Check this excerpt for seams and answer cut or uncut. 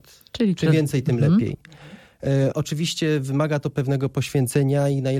cut